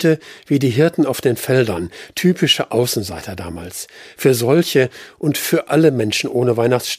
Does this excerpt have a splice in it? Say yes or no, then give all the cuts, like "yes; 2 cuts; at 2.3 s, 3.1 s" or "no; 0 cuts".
no; 0 cuts